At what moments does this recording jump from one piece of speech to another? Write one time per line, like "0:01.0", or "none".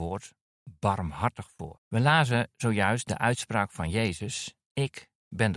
0:01.8

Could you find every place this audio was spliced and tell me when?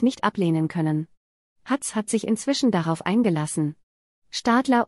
none

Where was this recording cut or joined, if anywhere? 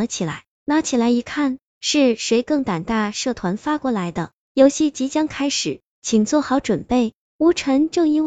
none

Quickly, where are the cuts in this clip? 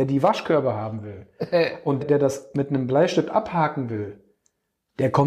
0:02.0

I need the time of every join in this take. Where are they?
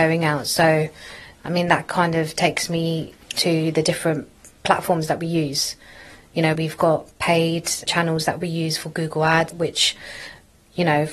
0:06.6
0:07.9
0:09.5

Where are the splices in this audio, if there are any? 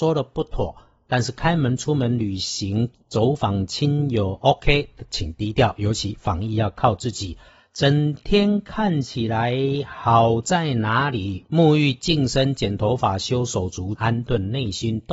0:11.4
0:13.9

